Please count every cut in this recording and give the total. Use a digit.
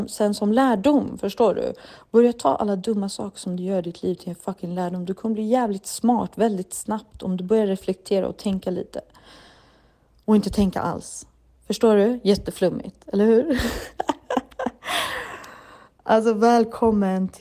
0